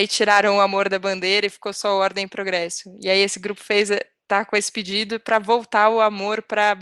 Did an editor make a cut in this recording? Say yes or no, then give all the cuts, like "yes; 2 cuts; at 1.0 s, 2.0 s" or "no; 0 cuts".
no; 0 cuts